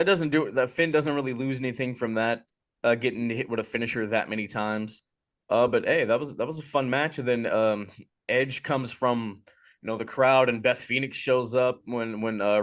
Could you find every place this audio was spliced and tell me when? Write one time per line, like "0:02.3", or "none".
none